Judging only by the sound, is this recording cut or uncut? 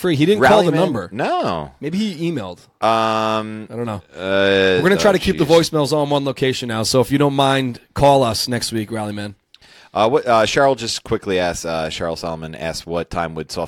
uncut